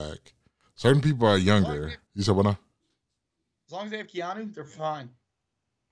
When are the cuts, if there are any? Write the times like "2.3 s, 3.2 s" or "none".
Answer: 2.1 s